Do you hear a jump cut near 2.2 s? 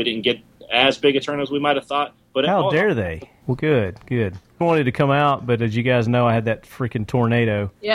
no; 2 cuts; at 3.4 s, 4.6 s

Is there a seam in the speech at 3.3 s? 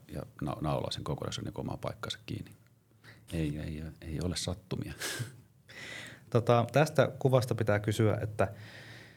yes; 1 cut; at 3.3 s

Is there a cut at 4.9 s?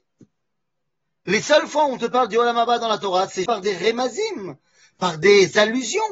no; 1 cut; at 3.5 s

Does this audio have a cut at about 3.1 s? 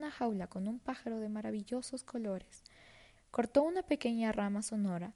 yes; 1 cut; at 3.1 s

